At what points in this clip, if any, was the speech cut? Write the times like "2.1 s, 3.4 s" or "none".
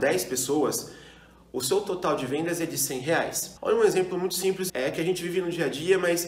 3.6 s, 4.7 s